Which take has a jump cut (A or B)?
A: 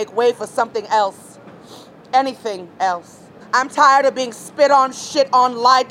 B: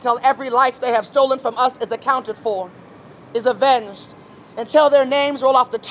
A